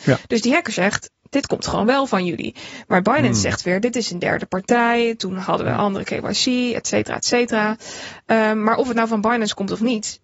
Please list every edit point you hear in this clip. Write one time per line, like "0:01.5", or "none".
none